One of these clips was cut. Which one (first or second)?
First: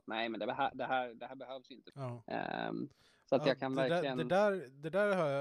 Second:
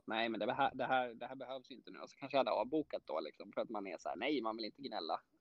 first